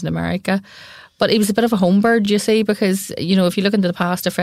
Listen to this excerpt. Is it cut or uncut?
uncut